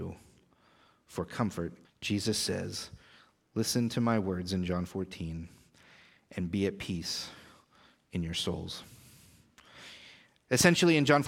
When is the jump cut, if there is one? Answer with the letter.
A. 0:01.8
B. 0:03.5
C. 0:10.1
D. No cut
A